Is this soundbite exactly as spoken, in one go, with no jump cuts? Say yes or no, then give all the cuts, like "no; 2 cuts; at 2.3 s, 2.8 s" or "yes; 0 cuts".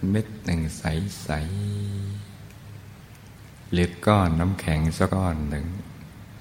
no; 1 cut; at 5.1 s